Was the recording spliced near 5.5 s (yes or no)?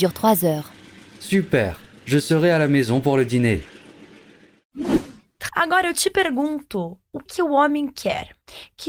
yes